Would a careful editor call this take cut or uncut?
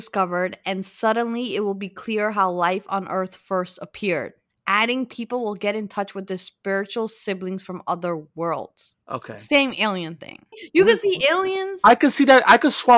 cut